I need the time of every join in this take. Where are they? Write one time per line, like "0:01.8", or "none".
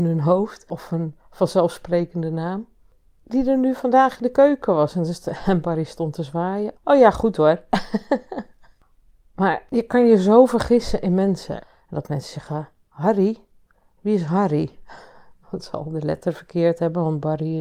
0:06.7
0:11.6